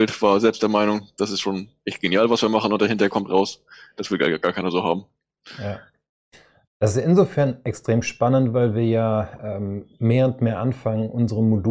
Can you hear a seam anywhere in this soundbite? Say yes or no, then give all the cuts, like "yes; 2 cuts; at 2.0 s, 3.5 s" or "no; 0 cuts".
no; 0 cuts